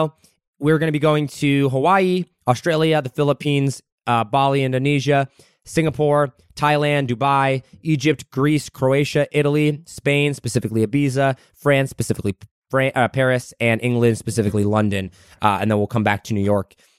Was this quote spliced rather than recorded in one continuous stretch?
no; 0 cuts

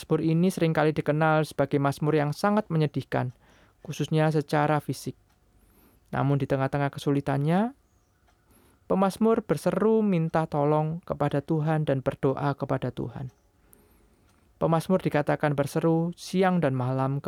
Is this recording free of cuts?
yes; 0 cuts

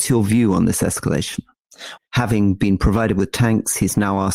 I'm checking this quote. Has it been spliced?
yes; 1 cut; at 2.0 s

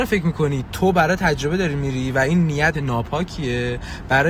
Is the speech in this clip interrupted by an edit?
yes; 1 cut; at 2.7 s

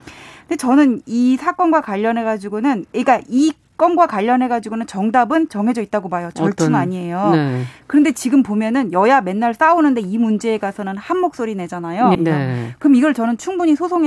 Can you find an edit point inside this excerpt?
yes; 1 cut; at 12.1 s

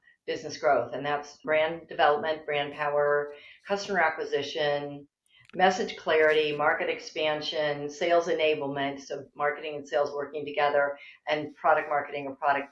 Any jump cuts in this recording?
no; 0 cuts

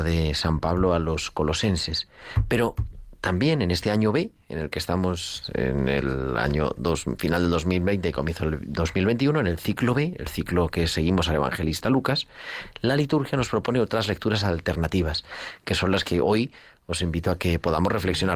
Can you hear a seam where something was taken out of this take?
no; 0 cuts

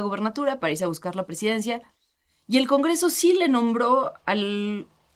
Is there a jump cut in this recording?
no; 0 cuts

